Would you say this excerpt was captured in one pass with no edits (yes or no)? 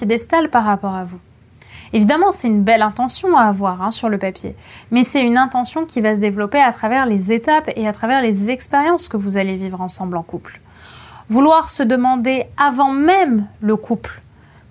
yes